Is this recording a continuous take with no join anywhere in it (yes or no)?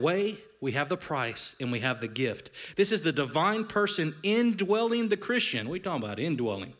yes